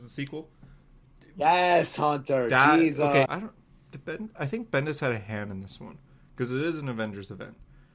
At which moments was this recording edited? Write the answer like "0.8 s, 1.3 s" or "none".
3.3 s

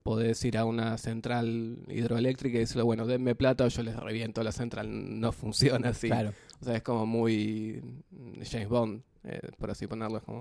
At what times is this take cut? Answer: none

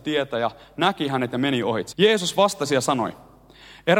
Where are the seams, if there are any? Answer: 1.9 s

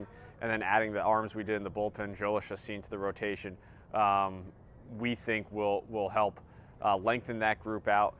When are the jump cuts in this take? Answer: none

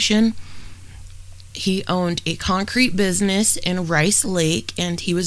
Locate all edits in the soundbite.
1.5 s

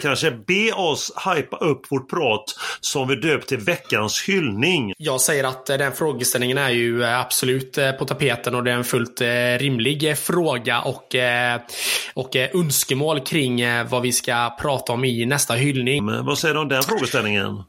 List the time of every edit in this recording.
4.9 s, 16.0 s

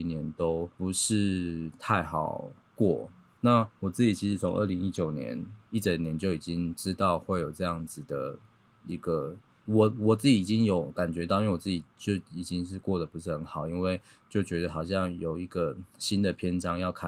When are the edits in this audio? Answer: 9.7 s

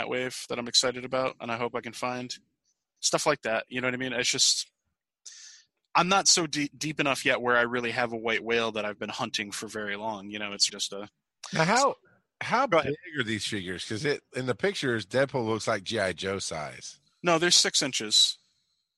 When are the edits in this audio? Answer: 10.7 s

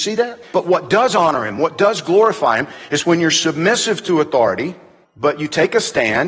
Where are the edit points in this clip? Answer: 5.0 s

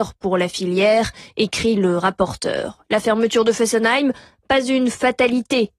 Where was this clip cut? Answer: none

